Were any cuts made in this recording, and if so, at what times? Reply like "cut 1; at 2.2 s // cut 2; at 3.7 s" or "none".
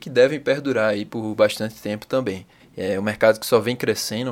none